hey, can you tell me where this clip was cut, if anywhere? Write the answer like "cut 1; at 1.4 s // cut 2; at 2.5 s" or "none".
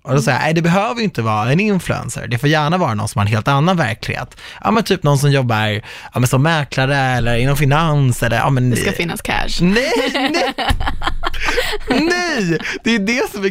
none